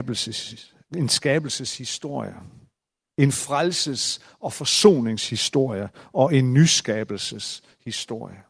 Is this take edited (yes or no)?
no